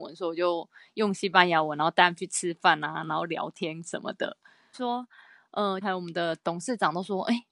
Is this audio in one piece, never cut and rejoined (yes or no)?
no